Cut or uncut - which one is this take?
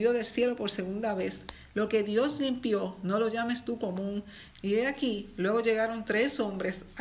cut